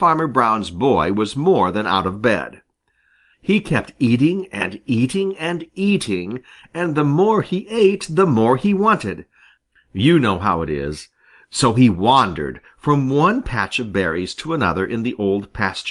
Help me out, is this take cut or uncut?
cut